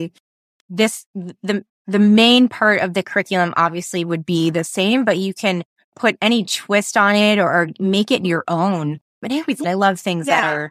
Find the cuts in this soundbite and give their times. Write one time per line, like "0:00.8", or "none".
0:01.7
0:09.6